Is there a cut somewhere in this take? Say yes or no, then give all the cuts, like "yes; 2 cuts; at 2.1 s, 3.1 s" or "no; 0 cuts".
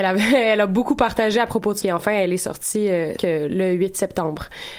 yes; 2 cuts; at 1.8 s, 3.2 s